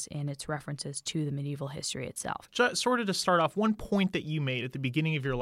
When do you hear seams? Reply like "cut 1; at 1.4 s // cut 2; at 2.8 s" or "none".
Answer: cut 1; at 2.5 s